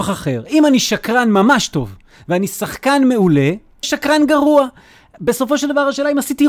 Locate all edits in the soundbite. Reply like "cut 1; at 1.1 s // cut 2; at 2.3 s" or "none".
cut 1; at 3.8 s